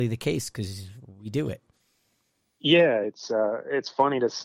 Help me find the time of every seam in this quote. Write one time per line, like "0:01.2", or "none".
0:03.0